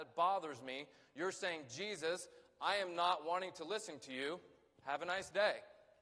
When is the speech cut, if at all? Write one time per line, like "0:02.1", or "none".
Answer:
none